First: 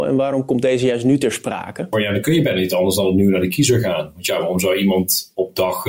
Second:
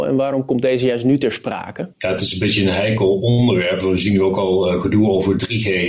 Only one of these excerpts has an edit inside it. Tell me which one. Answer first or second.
first